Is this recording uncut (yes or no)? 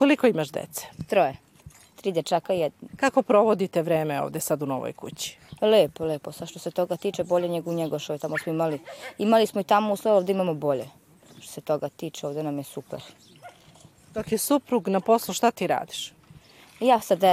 no